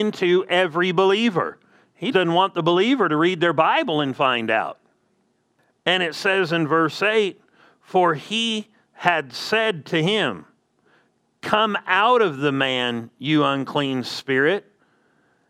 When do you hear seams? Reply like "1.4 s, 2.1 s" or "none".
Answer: 2.1 s